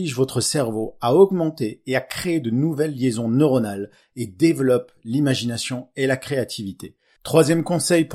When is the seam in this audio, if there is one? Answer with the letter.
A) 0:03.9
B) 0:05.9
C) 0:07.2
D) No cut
C